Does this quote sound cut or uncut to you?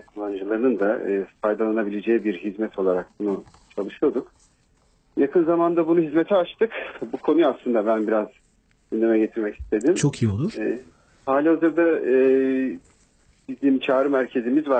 uncut